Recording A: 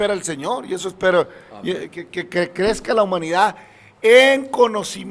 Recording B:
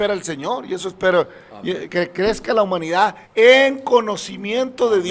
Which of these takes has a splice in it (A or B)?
B